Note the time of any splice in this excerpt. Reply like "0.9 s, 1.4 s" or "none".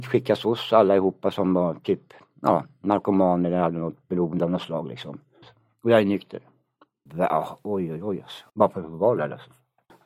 5.4 s, 7.1 s, 8.5 s